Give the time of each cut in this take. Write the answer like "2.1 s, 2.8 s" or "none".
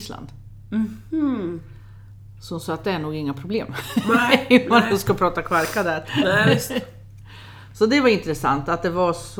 none

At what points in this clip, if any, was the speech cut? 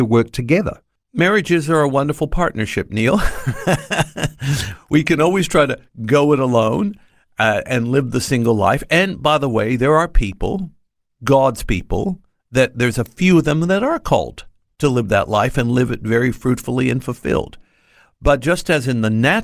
none

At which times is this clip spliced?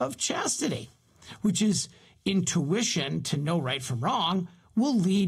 1.4 s

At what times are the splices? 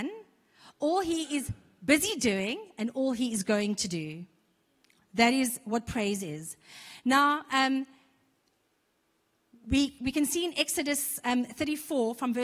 none

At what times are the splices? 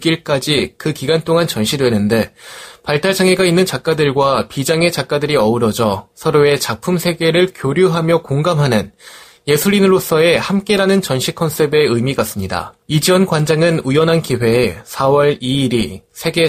12.8 s

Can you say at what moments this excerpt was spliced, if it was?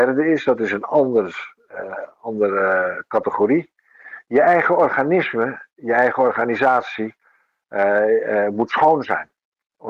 none

